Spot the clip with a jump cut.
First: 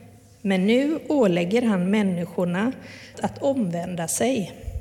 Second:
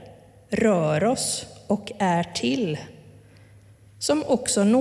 first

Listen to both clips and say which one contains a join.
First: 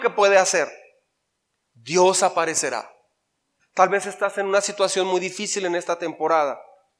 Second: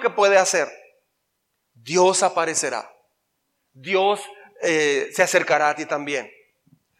first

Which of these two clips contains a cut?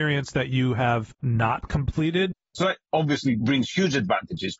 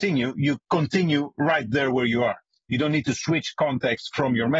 first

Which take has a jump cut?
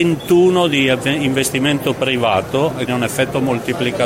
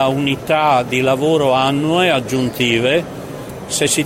first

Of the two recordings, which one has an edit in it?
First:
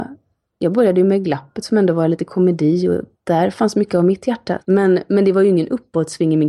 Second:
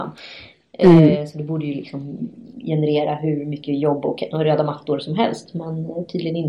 first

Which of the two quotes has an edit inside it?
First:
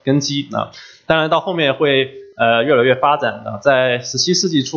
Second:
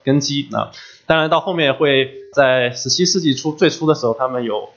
second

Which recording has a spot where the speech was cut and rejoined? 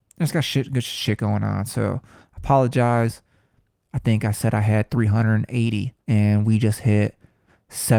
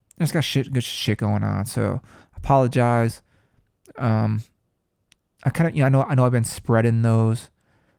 first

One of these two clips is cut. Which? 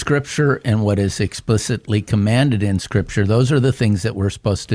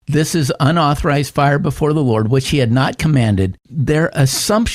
second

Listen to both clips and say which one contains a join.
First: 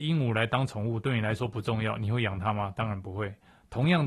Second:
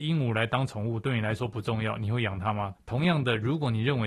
second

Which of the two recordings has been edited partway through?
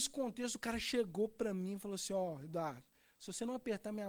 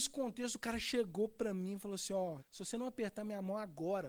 second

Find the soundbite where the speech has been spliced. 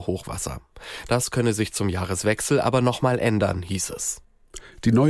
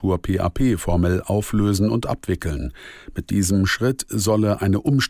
first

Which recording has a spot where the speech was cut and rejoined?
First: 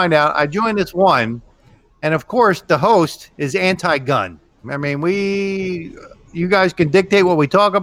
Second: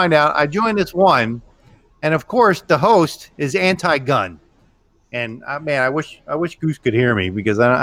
first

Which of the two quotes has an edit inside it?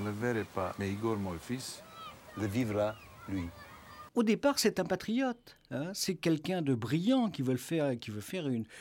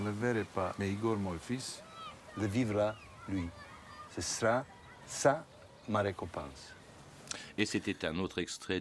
first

